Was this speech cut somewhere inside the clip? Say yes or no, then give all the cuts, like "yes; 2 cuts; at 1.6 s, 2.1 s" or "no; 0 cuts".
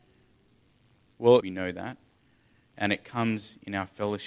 yes; 1 cut; at 1.4 s